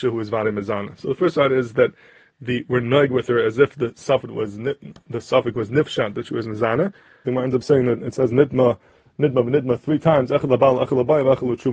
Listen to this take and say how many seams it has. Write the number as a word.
one